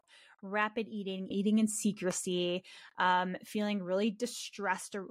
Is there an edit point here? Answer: yes; 1 cut; at 1.3 s

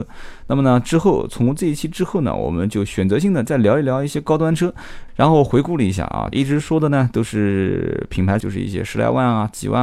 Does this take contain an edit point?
yes; 3 cuts; at 5.1 s, 6.3 s, 8.4 s

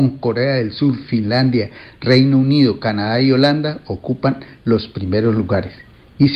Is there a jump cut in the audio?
no; 0 cuts

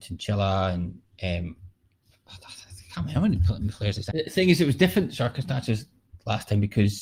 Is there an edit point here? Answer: yes; 1 cut; at 4.1 s

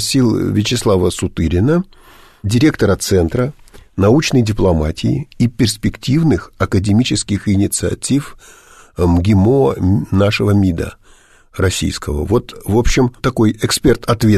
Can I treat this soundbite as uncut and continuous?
yes; 0 cuts

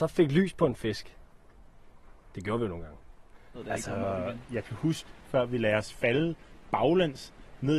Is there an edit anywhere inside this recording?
yes; 2 cuts; at 3.5 s, 5.3 s

